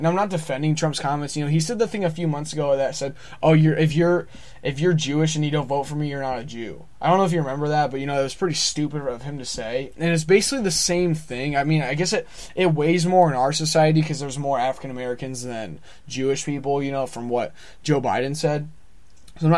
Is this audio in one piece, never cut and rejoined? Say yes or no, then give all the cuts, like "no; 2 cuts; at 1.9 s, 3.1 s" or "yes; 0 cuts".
yes; 0 cuts